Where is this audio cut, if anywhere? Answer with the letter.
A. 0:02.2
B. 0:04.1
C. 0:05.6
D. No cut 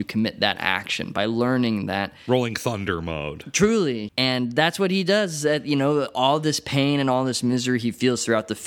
B